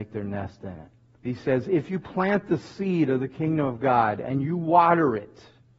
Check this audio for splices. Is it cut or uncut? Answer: cut